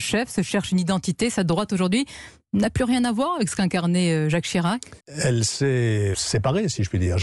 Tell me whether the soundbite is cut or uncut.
cut